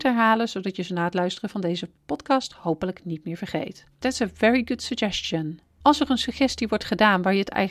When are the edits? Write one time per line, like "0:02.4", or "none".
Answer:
0:04.0
0:05.8